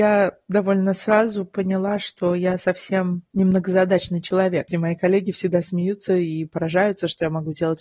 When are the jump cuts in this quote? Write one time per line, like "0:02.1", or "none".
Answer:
0:04.7

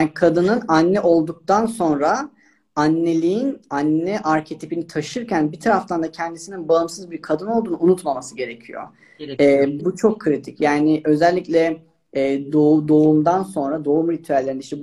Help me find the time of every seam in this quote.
0:09.8

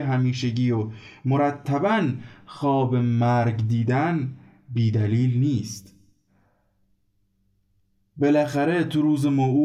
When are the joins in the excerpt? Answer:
none

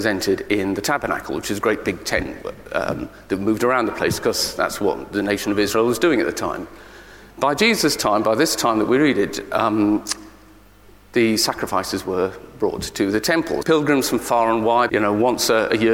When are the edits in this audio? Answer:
0:13.6
0:14.9

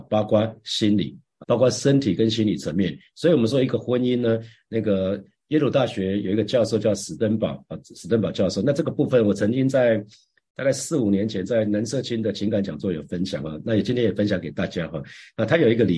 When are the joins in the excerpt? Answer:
0:01.4

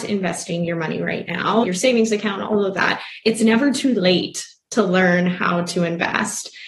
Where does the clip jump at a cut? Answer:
0:01.6

